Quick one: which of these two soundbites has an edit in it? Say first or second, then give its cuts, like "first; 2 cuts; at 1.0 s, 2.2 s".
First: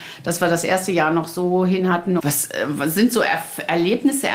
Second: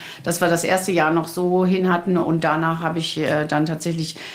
first; 1 cut; at 2.2 s